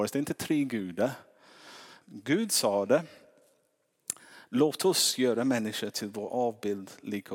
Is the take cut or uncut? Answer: cut